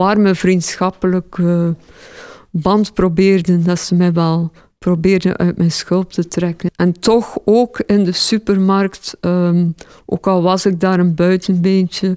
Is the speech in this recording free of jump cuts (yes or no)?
no